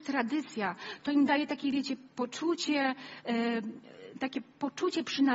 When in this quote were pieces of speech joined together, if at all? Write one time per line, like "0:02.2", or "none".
none